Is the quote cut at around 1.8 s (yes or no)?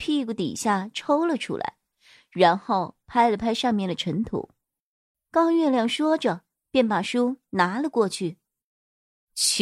no